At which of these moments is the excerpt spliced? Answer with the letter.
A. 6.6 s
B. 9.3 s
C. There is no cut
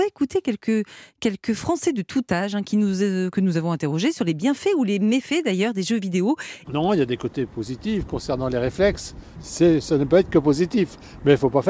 A